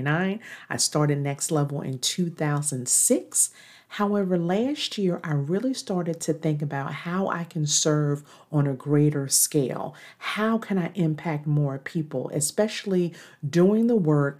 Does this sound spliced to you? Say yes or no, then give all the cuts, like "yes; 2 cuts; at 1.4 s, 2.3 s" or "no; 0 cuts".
no; 0 cuts